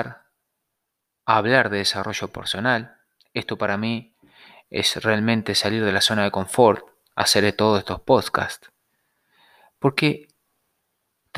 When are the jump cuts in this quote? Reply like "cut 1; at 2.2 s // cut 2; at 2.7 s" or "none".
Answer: none